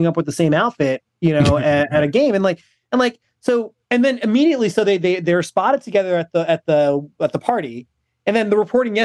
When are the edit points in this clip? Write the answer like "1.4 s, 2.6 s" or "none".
3.8 s